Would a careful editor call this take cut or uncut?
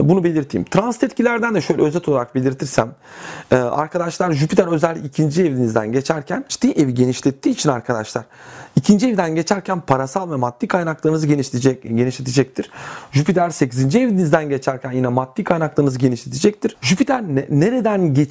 uncut